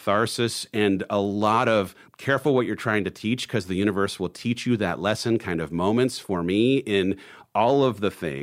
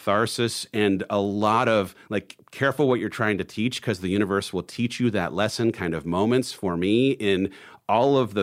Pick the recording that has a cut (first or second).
first